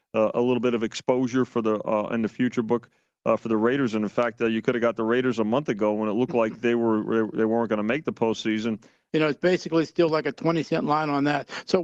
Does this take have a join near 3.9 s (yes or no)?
no